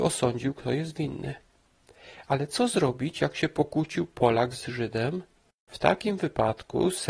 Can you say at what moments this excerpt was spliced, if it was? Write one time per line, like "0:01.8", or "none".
0:05.5